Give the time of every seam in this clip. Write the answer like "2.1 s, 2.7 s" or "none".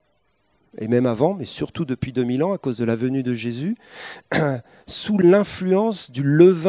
none